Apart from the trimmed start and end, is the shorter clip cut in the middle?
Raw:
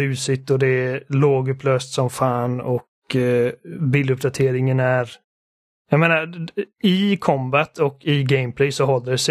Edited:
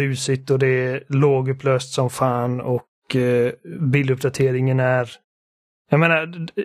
no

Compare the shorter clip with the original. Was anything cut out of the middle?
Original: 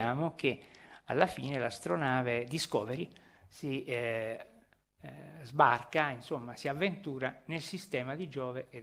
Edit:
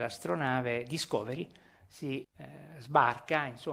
yes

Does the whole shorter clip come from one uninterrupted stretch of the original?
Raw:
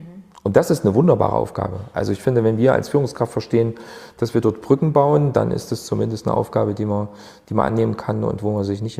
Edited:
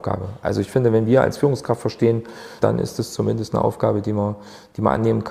no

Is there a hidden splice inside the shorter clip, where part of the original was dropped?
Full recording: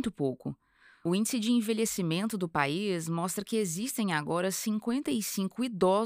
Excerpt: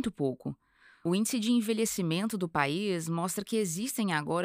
no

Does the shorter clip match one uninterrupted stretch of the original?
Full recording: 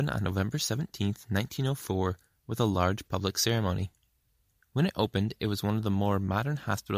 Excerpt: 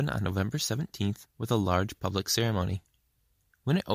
no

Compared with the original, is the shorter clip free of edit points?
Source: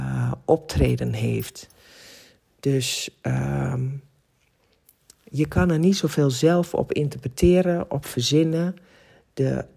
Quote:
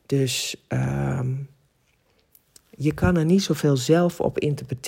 yes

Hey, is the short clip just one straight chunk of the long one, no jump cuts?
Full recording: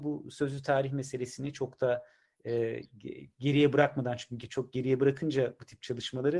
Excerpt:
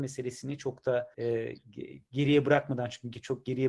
no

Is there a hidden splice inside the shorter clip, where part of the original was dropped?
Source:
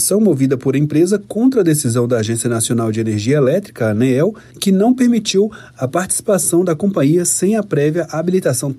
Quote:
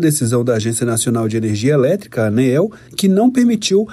no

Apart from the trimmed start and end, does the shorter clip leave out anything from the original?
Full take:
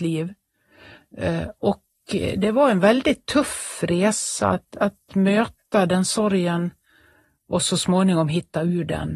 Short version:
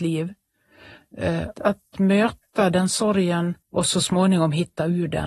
yes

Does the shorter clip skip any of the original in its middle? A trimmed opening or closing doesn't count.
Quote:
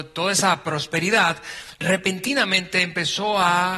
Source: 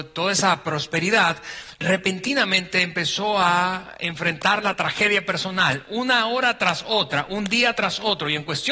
no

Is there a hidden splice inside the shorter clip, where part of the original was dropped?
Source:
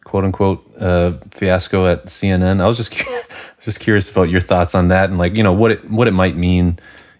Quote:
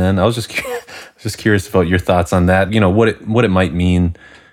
yes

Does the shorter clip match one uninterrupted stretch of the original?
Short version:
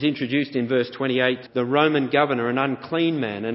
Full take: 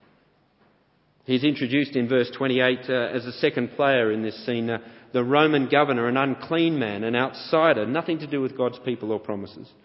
no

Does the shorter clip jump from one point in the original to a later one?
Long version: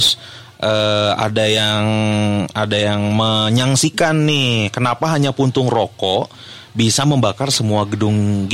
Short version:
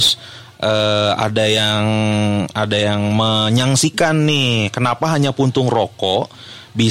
no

